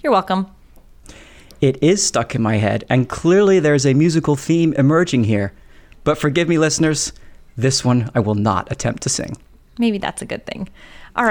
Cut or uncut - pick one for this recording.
uncut